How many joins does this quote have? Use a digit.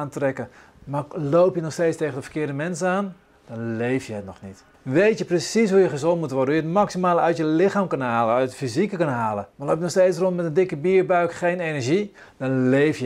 2